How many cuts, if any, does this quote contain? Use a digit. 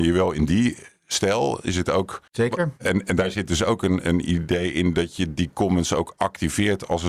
1